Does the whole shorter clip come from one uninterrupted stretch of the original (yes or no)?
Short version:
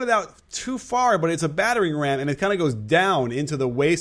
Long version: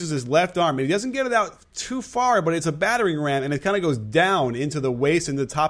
yes